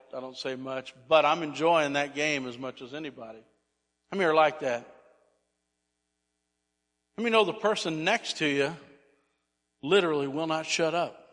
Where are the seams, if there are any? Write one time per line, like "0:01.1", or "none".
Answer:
none